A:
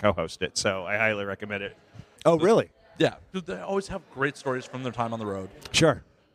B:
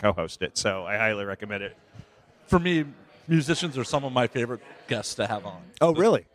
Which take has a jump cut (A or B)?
A